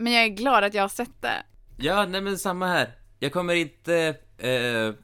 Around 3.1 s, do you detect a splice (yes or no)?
no